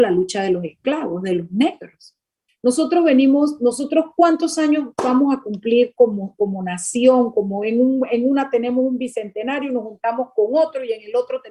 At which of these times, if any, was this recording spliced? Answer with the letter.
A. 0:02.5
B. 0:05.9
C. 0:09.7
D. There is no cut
A